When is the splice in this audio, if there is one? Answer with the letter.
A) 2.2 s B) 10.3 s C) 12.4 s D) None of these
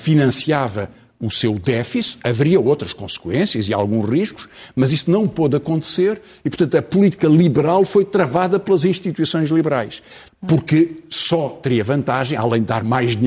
B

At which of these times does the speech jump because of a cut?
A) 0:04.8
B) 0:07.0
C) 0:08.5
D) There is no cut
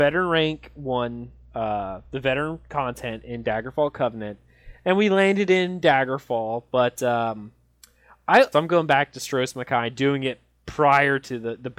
C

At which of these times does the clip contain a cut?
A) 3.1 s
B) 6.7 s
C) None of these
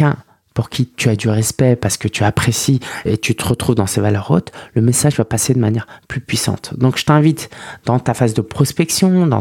A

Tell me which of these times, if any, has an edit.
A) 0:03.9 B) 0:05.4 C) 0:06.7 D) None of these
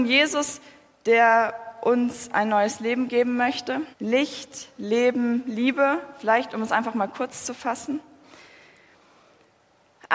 A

